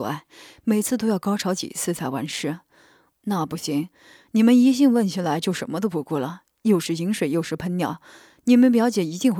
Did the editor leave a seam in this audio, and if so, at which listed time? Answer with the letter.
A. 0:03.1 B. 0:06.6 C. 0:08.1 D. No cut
A